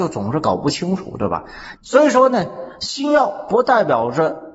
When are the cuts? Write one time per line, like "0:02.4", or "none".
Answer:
0:01.7